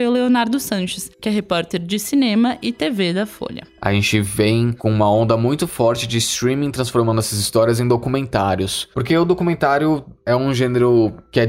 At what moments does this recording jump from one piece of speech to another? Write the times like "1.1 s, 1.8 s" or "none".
none